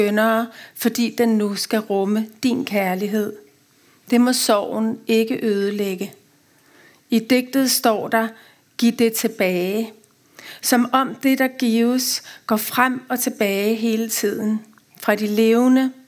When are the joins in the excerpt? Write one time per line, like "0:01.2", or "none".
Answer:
none

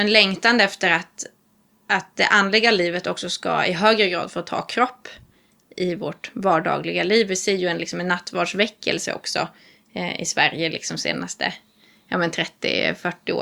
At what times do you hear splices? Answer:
none

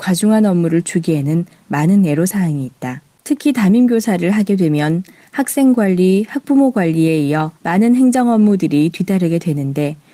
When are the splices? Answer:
0:03.2
0:07.6

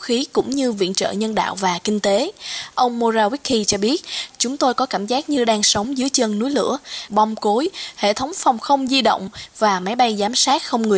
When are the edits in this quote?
0:04.3
0:07.1

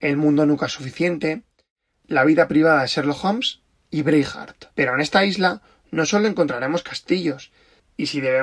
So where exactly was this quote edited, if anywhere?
0:04.7

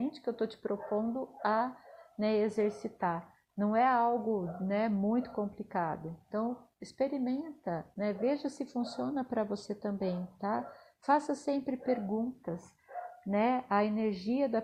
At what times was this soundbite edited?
none

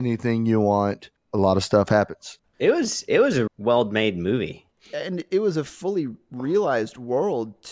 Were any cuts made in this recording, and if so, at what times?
0:03.5
0:05.7

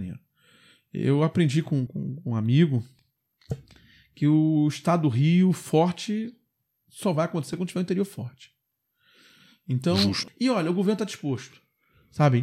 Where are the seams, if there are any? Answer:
0:01.9
0:10.3

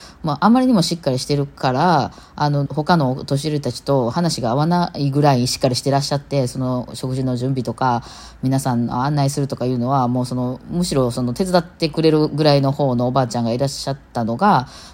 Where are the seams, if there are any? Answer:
0:02.7

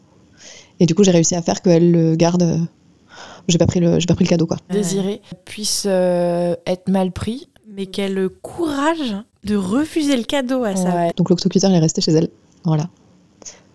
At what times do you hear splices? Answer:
0:04.7
0:11.1

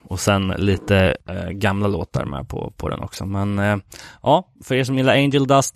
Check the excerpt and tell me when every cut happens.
none

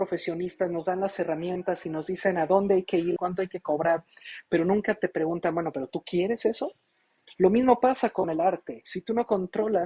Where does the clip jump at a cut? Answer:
0:03.2
0:07.4

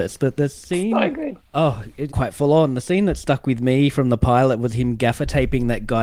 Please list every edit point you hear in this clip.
0:02.1

